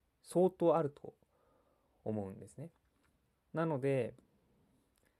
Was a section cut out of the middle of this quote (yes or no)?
yes